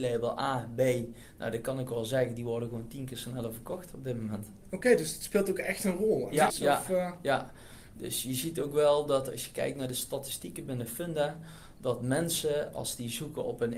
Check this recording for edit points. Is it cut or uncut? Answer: cut